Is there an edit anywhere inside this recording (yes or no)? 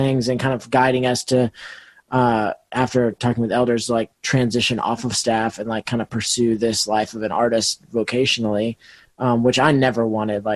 no